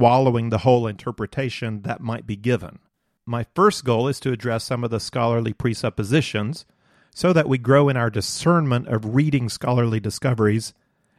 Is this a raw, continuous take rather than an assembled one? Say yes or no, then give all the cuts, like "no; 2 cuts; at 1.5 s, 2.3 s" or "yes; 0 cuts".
no; 1 cut; at 3.2 s